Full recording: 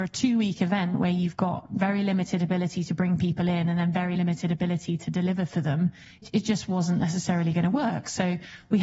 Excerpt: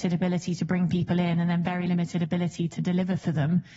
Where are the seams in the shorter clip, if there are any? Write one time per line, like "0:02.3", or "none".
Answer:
none

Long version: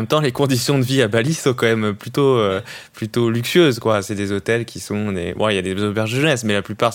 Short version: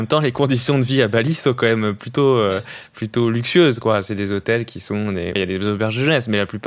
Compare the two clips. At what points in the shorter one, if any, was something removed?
0:05.4

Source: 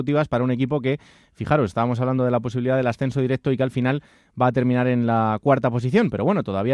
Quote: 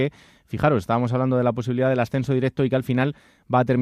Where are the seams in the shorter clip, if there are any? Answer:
none

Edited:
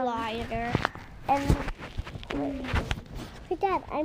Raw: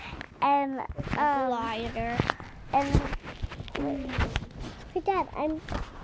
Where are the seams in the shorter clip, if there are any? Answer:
none

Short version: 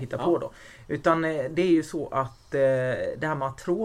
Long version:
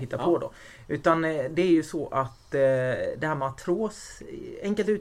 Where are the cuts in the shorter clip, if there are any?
none

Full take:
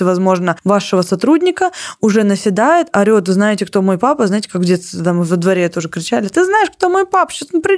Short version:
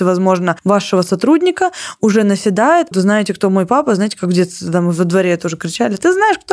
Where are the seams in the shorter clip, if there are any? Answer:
0:02.9

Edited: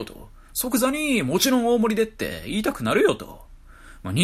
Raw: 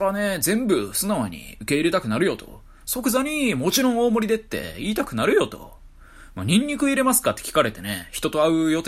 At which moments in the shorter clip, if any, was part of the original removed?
none

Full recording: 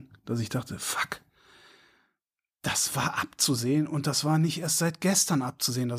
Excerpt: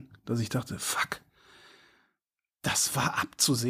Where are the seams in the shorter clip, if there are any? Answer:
none

